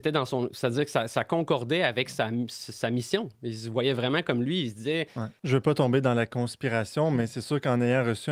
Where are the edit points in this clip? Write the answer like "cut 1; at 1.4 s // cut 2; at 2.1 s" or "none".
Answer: cut 1; at 5.4 s